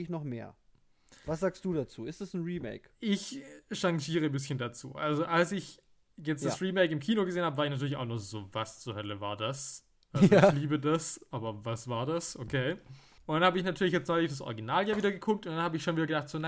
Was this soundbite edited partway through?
no; 0 cuts

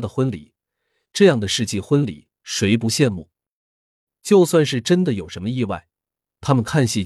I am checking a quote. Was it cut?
no; 0 cuts

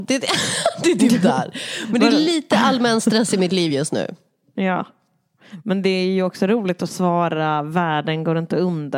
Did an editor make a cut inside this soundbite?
no; 0 cuts

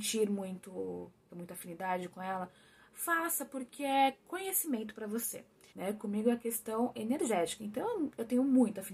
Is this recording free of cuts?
no; 2 cuts; at 1.3 s, 5.7 s

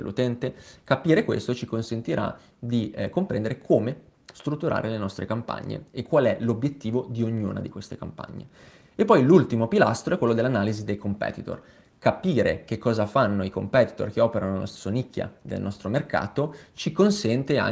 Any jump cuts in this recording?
no; 0 cuts

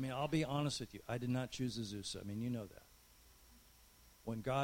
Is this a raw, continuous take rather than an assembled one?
yes; 0 cuts

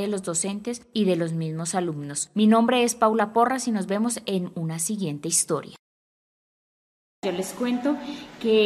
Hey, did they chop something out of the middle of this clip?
no; 0 cuts

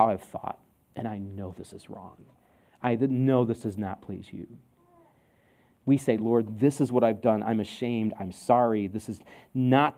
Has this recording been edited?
no; 0 cuts

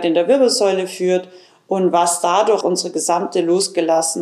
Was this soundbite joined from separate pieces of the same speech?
yes; 1 cut; at 2.6 s

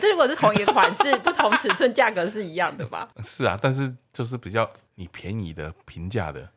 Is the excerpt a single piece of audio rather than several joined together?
no; 2 cuts; at 3.1 s, 4.9 s

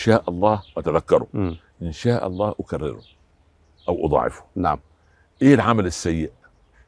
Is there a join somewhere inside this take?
no; 0 cuts

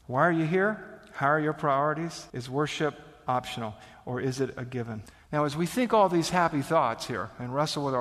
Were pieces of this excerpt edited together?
no; 0 cuts

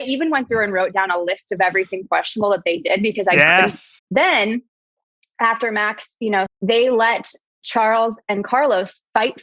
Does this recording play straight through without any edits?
no; 2 cuts; at 4.0 s, 6.5 s

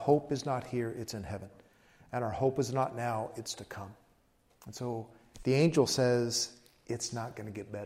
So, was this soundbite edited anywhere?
no; 0 cuts

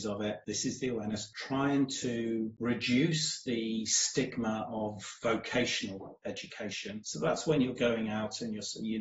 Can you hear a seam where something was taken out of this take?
yes; 1 cut; at 7.0 s

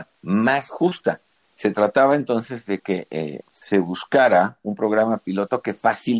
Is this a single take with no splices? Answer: no; 2 cuts; at 1.5 s, 3.4 s

